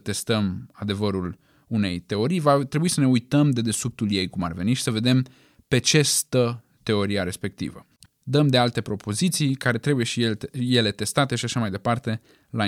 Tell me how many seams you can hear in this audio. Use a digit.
1